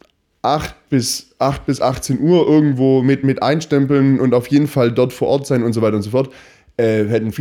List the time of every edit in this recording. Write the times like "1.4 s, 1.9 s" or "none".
none